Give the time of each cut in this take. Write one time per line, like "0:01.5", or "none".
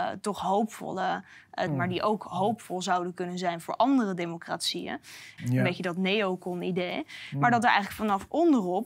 0:01.7
0:05.4